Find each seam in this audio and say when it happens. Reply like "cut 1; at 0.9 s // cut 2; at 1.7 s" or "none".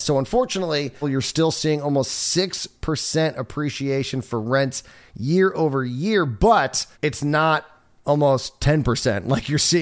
cut 1; at 1.0 s // cut 2; at 6.9 s